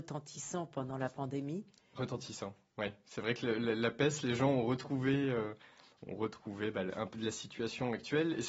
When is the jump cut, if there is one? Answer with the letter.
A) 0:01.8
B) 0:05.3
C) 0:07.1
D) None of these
C